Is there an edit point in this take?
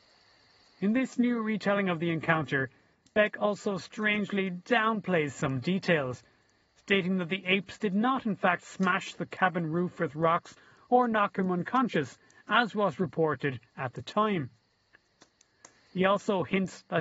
no; 0 cuts

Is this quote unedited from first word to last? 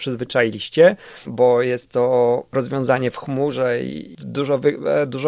no; 1 cut; at 1.2 s

